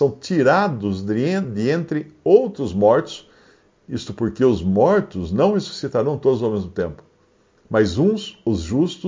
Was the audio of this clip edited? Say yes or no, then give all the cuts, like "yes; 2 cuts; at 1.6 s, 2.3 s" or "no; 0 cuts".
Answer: no; 0 cuts